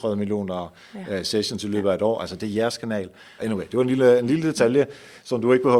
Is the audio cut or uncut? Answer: cut